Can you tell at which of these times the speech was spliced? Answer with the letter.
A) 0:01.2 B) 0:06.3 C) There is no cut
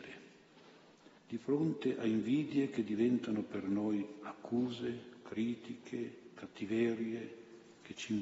A